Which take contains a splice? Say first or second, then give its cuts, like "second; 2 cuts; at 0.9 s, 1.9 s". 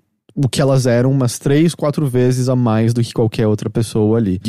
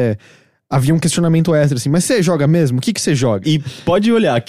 second; 1 cut; at 3.4 s